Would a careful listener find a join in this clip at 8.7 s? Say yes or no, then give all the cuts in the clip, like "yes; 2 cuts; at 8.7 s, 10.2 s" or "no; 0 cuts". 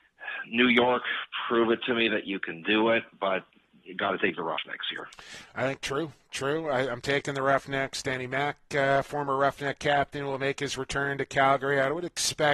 no; 1 cut; at 5.8 s